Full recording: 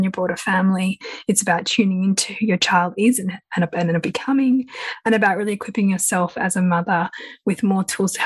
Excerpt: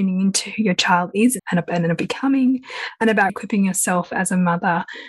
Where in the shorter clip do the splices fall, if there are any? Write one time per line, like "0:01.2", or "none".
0:01.4
0:03.3